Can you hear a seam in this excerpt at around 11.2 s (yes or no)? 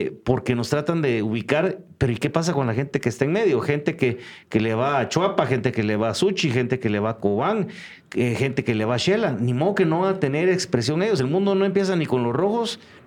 no